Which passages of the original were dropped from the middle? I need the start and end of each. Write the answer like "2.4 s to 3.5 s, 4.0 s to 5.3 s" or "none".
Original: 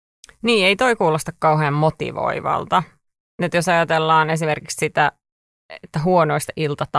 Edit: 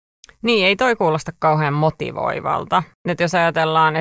2.9 s to 3.3 s